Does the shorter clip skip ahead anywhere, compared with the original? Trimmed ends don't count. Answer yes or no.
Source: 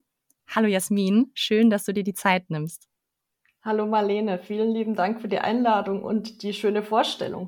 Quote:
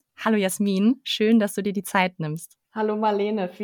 yes